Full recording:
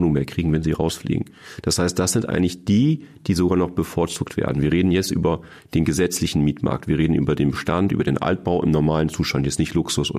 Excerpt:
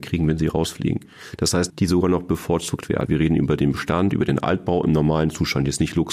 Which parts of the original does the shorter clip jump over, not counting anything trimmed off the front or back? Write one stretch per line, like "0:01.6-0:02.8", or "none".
0:01.9-0:03.2
0:04.5-0:06.8